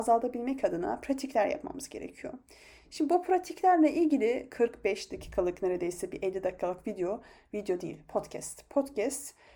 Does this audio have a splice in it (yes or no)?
no